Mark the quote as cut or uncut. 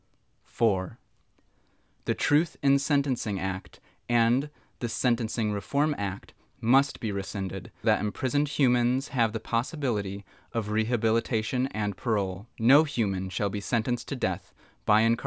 cut